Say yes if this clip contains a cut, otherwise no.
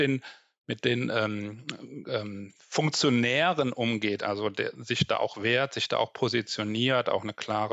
yes